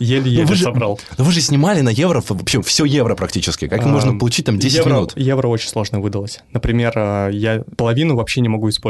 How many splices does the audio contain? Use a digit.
1